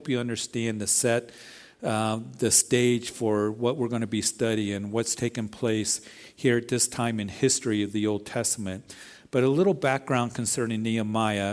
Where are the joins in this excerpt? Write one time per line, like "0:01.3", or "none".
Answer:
none